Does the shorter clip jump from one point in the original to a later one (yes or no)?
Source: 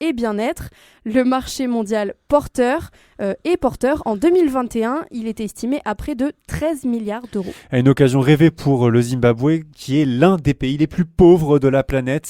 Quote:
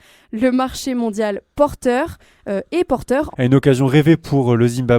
yes